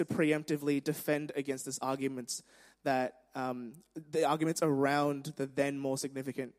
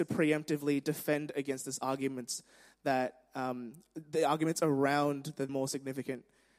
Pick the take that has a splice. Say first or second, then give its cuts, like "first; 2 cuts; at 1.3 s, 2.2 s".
second; 1 cut; at 5.5 s